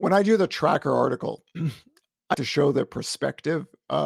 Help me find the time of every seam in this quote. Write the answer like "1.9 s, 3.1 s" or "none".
2.3 s